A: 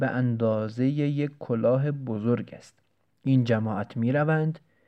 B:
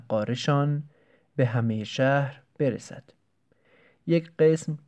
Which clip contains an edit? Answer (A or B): A